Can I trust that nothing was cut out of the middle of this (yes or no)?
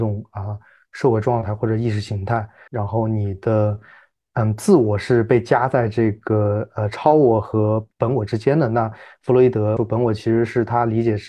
no